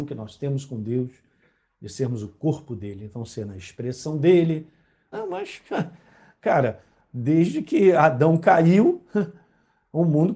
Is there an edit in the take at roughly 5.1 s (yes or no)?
yes